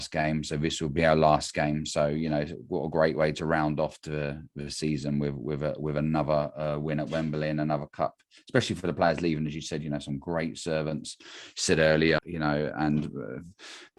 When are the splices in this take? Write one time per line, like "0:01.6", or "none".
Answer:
0:12.2